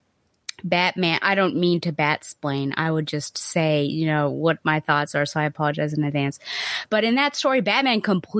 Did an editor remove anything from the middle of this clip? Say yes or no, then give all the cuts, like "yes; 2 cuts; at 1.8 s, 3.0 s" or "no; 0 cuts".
no; 0 cuts